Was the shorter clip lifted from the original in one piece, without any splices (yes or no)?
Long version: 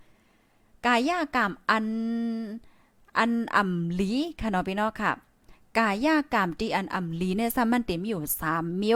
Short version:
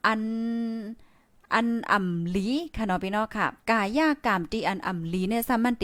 no